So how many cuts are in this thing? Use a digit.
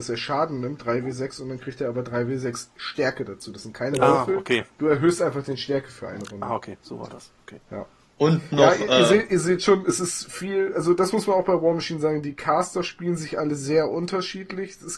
0